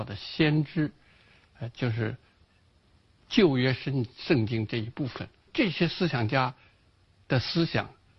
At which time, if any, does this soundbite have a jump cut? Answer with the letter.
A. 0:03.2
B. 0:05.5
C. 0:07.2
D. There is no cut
B